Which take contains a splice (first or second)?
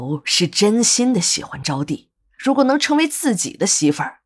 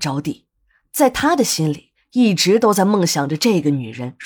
first